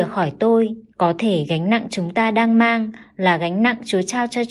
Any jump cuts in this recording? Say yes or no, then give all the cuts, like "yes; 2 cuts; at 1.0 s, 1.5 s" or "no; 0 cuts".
yes; 1 cut; at 0.9 s